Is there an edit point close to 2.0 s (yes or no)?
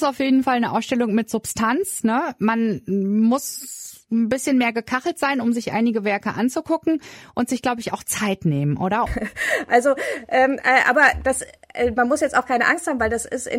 no